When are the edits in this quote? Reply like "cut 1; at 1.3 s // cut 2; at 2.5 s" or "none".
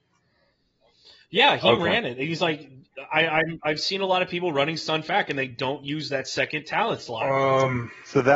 none